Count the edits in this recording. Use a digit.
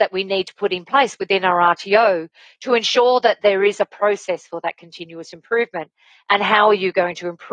0